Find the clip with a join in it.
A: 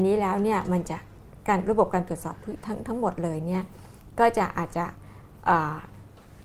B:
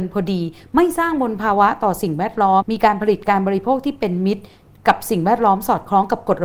B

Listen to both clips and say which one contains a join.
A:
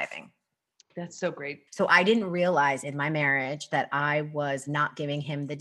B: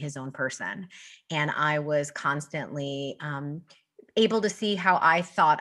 A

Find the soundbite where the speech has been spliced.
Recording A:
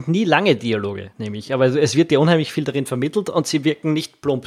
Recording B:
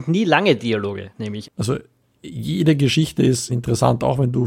B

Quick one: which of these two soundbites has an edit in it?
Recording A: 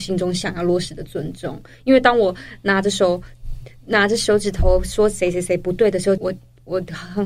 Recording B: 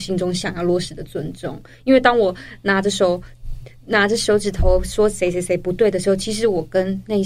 A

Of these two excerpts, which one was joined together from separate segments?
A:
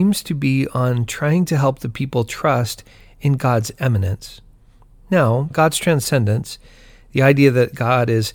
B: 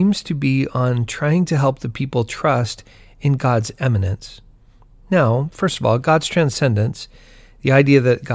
A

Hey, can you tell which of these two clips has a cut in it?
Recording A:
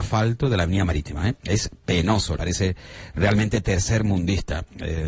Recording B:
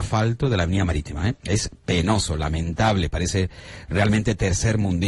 A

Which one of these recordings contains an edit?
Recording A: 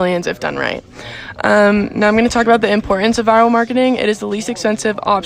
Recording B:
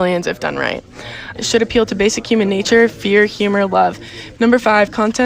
B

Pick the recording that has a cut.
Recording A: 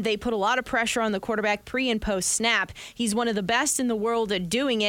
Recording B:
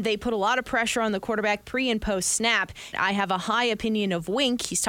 B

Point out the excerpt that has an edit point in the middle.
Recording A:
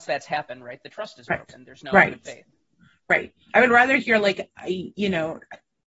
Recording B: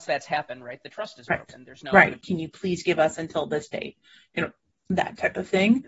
B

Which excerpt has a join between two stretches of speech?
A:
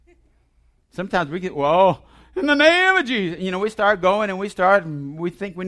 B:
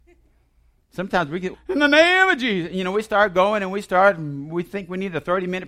B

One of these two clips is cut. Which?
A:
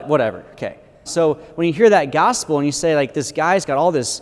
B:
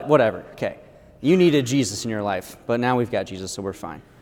A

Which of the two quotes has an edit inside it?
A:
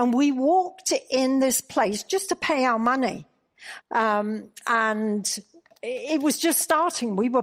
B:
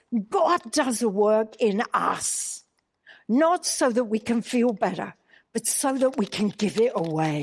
A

